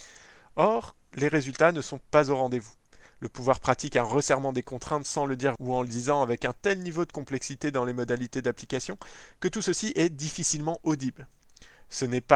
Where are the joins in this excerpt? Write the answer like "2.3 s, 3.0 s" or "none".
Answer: 5.6 s